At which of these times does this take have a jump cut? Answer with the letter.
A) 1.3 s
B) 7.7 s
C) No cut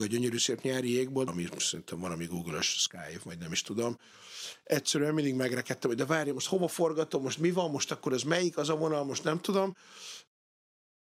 A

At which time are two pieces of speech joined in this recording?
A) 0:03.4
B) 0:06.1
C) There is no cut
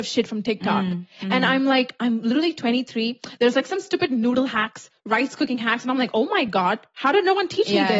C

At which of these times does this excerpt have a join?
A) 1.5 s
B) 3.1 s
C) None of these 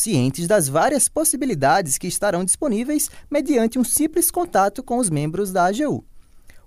C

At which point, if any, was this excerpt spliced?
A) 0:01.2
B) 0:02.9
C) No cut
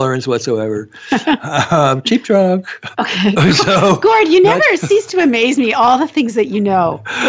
B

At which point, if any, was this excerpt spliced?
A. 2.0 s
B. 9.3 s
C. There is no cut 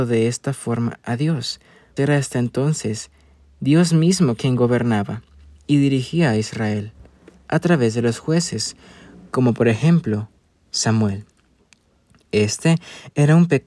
A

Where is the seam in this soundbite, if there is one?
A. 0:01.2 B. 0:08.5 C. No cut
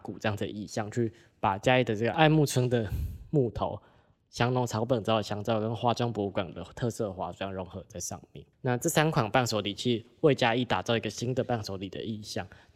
B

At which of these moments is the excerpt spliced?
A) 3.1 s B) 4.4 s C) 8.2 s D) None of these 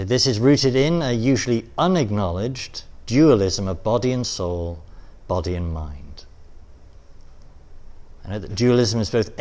D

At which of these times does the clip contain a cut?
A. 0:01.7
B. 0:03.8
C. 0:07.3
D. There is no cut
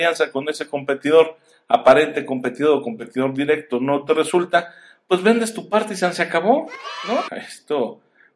C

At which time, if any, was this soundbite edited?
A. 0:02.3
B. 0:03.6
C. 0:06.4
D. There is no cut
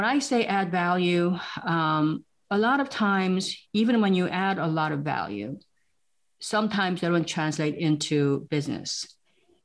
D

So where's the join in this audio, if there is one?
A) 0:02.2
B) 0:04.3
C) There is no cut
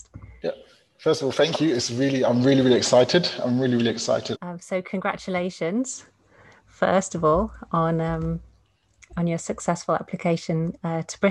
B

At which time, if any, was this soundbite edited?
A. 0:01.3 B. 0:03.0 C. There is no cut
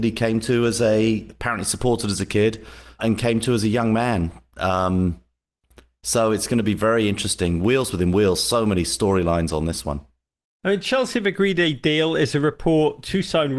B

